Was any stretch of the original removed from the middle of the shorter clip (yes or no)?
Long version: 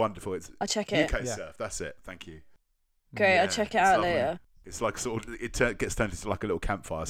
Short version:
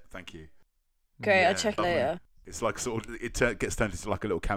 yes